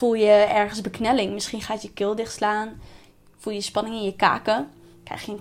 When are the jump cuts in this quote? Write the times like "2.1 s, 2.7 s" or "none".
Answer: none